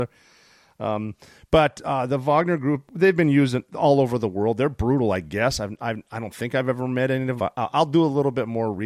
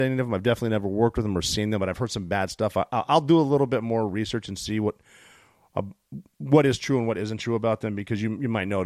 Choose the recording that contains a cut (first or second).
first